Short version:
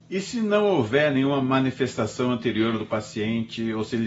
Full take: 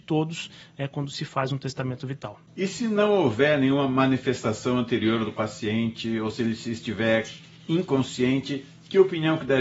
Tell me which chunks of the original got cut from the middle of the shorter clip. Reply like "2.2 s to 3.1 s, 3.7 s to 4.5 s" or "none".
none